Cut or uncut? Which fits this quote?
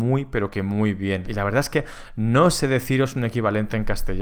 cut